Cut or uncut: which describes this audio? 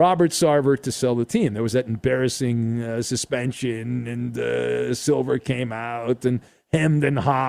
uncut